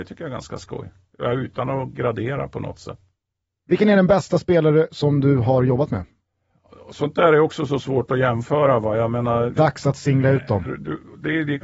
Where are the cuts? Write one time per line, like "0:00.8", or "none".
0:09.6
0:10.6